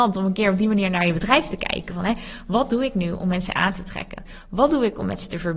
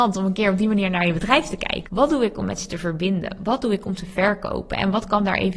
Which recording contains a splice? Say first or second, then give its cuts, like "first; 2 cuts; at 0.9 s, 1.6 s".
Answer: second; 1 cut; at 1.8 s